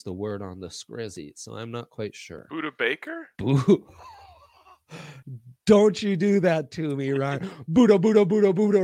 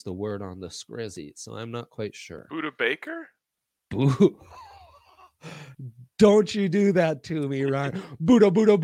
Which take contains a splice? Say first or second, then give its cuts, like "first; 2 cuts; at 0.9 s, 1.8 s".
first; 1 cut; at 3.3 s